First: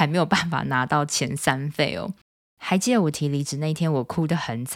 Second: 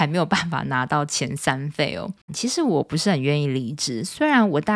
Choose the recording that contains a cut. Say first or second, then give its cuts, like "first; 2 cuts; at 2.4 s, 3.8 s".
second; 1 cut; at 2.3 s